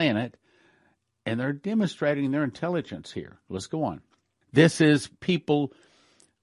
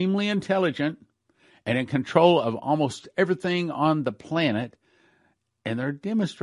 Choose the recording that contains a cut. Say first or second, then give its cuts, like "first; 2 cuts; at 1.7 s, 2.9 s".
first; 1 cut; at 4.4 s